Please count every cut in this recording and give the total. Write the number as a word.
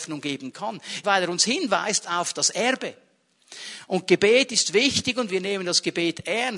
one